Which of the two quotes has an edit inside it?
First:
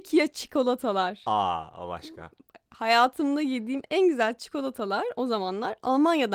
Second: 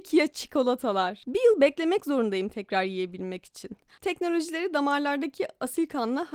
second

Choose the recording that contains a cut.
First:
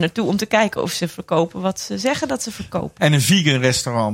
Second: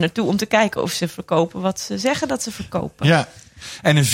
first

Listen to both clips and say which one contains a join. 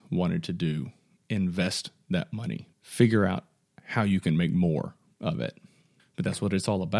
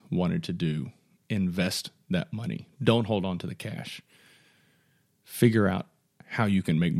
first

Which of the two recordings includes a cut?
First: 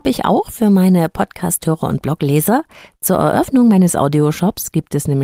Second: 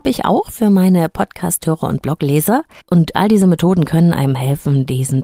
second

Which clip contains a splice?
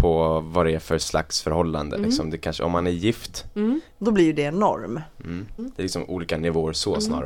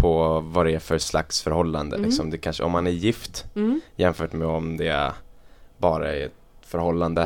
first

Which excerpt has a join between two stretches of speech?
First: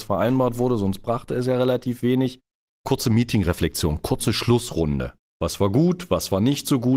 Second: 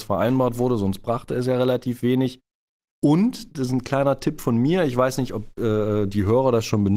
first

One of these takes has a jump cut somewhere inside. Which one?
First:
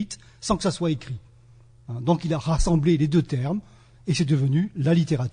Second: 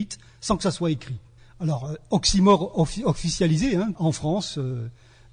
second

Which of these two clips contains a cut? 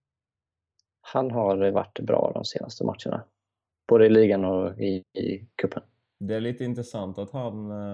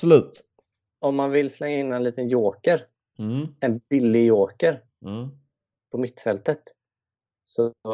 second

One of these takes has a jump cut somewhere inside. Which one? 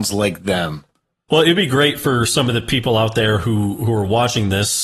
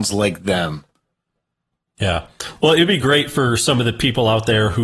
first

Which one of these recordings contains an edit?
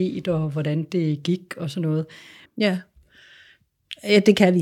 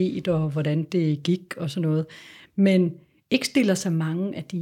first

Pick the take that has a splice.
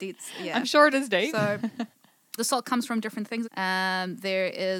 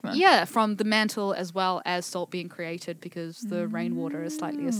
first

